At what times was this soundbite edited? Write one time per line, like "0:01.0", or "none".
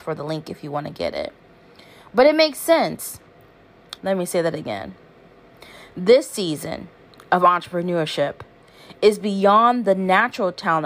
0:04.0